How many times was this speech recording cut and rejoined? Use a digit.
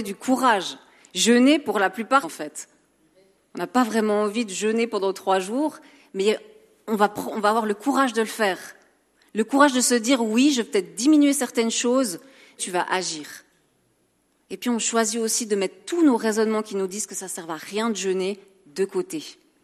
2